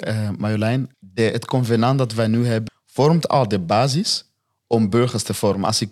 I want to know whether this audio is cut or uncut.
cut